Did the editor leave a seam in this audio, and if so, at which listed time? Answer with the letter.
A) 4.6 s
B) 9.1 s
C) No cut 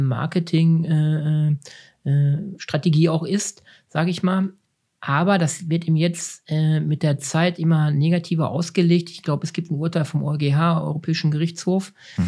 C